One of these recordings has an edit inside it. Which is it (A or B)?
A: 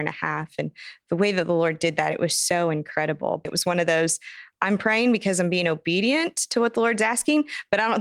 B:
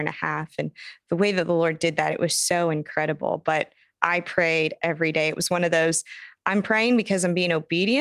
A